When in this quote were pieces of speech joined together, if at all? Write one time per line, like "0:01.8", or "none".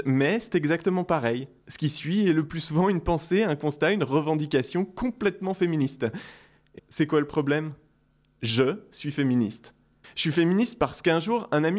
0:06.8
0:10.0